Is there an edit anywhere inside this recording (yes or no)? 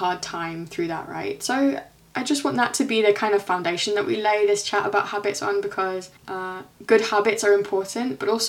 yes